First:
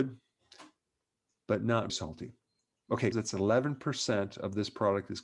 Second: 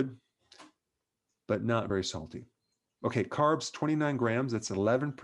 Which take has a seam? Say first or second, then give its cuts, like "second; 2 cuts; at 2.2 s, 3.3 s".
first; 2 cuts; at 1.9 s, 3.1 s